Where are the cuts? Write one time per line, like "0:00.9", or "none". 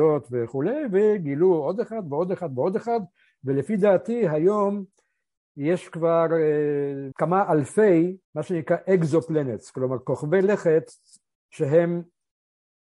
0:07.1
0:08.2